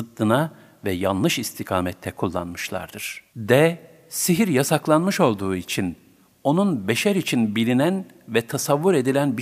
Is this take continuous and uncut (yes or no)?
no